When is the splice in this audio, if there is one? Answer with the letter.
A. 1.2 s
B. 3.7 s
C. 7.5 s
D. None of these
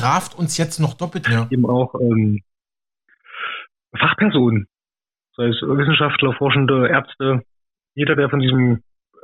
A